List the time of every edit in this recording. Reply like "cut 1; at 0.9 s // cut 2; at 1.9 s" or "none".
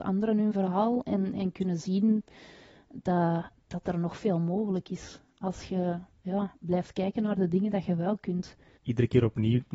cut 1; at 8.8 s